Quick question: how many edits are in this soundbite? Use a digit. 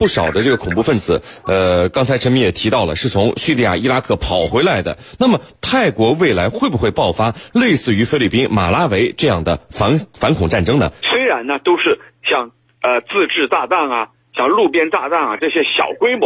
1